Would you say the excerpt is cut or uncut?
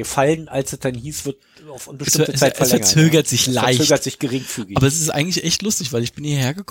uncut